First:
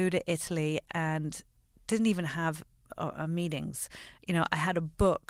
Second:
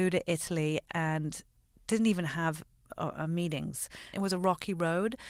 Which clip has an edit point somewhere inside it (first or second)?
second